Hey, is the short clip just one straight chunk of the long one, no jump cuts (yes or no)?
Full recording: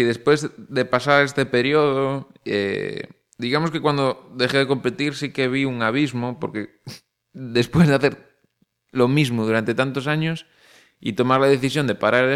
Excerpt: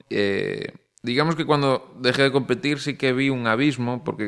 yes